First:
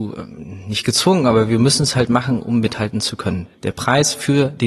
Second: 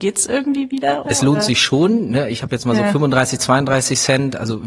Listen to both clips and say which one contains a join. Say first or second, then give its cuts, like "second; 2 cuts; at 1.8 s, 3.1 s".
second; 1 cut; at 1.0 s